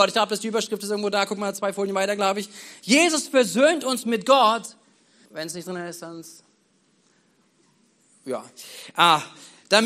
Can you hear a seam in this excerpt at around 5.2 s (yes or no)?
yes